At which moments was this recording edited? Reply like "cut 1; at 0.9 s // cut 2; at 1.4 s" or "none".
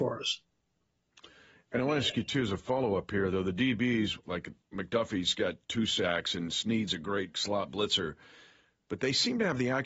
cut 1; at 4.2 s // cut 2; at 7.3 s